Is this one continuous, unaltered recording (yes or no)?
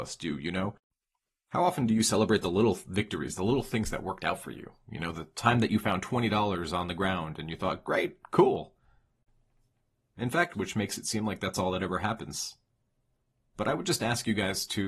no